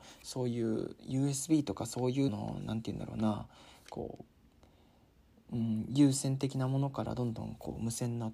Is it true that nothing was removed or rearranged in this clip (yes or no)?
no